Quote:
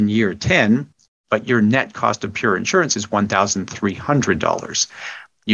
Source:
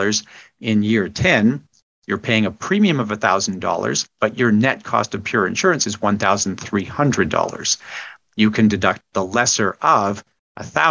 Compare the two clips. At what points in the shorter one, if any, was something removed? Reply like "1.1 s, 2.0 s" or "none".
1.2 s